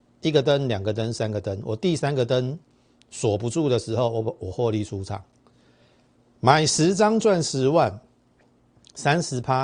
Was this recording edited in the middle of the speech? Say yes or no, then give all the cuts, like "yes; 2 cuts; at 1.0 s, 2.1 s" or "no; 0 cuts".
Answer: no; 0 cuts